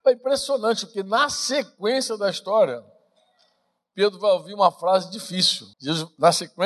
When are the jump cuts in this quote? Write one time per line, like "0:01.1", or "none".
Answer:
0:05.7